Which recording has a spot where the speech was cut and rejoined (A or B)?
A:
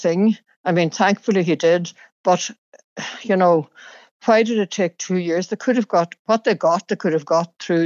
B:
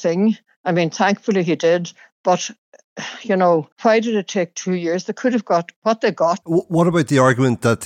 B